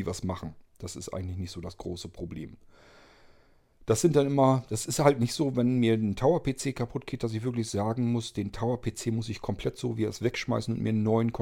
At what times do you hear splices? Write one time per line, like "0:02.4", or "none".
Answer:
none